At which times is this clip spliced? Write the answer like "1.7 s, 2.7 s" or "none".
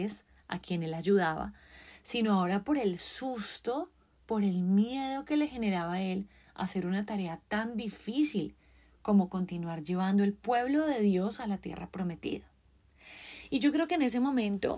none